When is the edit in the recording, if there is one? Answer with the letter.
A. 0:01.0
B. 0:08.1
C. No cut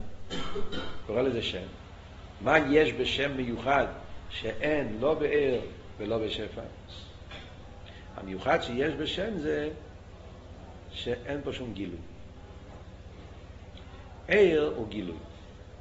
A